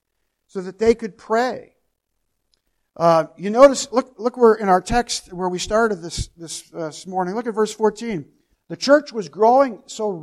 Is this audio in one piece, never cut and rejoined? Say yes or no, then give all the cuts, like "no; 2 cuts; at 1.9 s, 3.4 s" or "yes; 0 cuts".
no; 1 cut; at 8.5 s